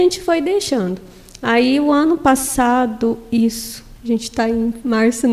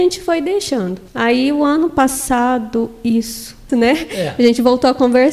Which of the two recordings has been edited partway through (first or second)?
second